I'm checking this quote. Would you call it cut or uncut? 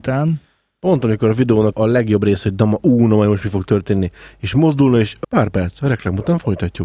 cut